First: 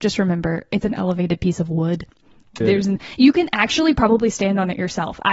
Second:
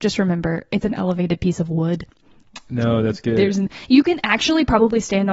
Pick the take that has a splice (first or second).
first